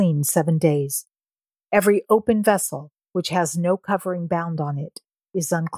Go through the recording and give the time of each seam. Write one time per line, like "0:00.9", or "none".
none